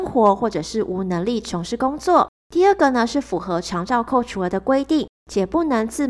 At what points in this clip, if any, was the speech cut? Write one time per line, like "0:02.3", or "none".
0:02.4